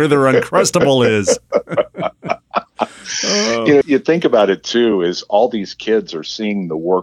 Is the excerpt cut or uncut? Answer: cut